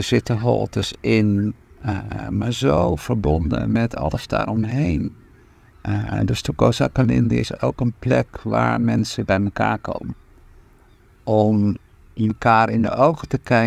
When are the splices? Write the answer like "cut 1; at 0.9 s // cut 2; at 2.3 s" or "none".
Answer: cut 1; at 5.7 s